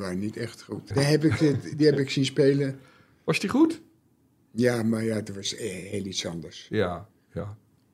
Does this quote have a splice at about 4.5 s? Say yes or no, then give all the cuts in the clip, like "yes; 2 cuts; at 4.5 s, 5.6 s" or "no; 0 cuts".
no; 1 cut; at 0.9 s